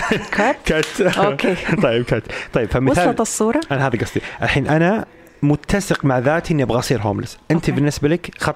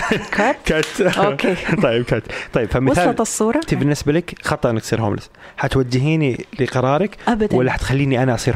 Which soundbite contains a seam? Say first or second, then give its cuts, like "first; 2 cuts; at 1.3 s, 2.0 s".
second; 1 cut; at 3.7 s